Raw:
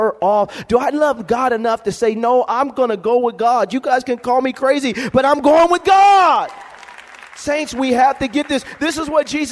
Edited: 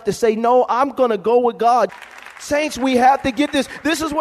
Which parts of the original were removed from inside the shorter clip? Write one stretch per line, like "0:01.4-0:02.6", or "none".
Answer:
0:03.7-0:06.9